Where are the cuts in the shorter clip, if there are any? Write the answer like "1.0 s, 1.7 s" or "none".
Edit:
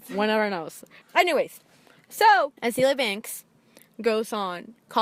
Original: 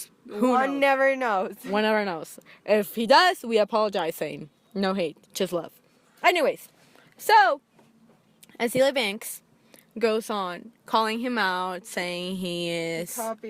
1.0 s, 2.6 s